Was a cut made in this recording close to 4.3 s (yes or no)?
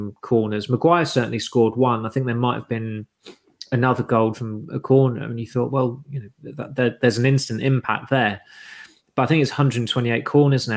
yes